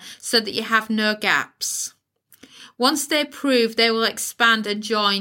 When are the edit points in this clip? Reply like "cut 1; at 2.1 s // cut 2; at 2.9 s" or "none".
none